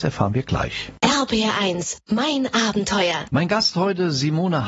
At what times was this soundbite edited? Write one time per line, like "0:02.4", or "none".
none